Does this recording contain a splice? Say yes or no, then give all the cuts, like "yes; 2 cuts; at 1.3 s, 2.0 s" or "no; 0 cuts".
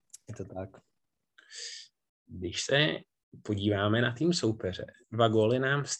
no; 0 cuts